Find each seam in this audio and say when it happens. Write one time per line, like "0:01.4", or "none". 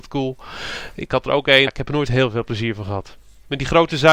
0:01.7